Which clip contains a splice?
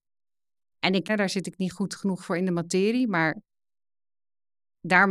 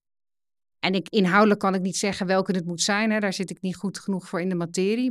first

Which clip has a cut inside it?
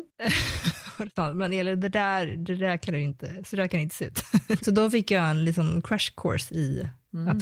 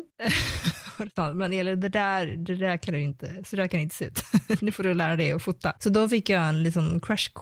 first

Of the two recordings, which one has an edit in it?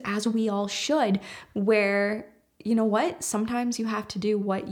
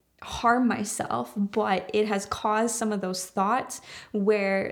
first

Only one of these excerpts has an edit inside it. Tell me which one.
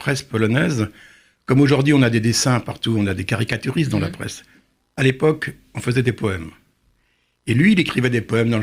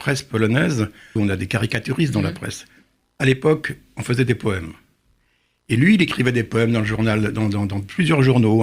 second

